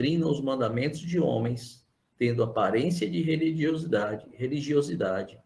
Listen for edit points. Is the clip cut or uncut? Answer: uncut